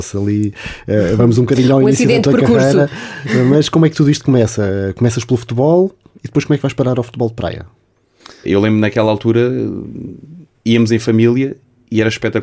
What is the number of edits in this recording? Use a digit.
1